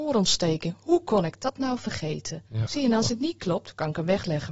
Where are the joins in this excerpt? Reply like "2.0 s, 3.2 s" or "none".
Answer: 2.5 s